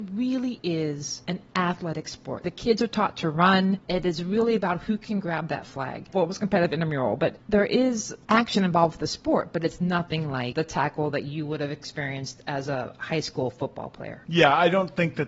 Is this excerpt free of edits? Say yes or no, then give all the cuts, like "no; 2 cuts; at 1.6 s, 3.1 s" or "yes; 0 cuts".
no; 1 cut; at 6.1 s